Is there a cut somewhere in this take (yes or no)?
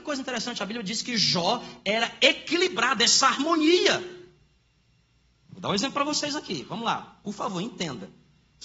yes